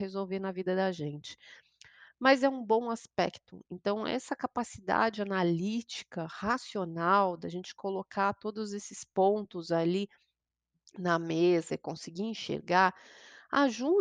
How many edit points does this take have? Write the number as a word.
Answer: zero